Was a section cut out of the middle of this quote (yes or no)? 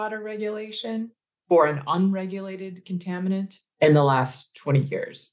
no